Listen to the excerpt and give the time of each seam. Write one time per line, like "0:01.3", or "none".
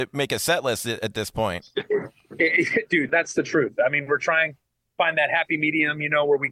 0:03.1